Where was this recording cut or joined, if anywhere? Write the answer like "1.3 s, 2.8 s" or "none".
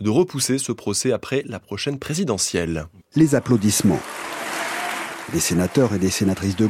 3.0 s